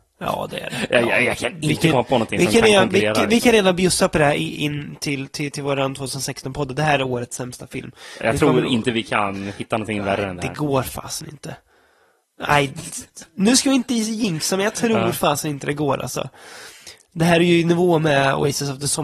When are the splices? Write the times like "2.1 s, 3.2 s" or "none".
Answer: none